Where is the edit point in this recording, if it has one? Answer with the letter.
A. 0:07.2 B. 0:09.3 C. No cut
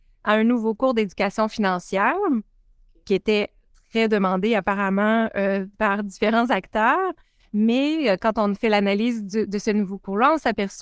C